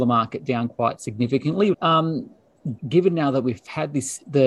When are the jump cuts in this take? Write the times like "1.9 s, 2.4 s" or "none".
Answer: 1.7 s, 2.8 s